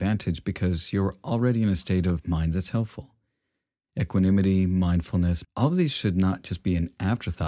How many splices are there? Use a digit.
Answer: 2